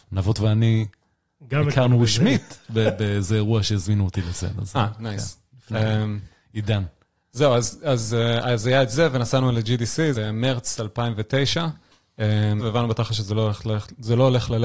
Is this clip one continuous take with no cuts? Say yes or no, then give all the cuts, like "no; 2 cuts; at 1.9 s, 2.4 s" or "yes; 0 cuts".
no; 2 cuts; at 10.1 s, 12.6 s